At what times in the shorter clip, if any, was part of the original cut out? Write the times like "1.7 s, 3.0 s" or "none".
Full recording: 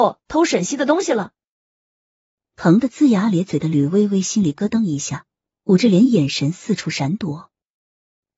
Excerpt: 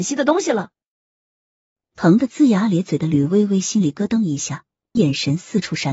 5.0 s